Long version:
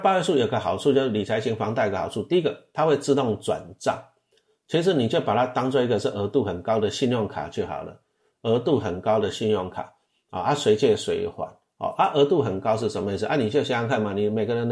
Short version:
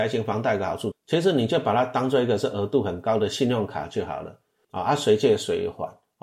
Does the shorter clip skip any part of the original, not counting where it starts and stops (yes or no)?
yes